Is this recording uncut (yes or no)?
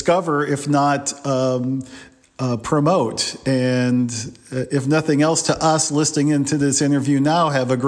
yes